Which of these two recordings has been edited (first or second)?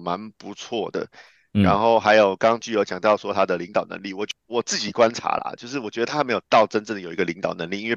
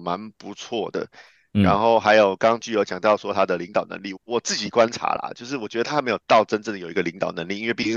second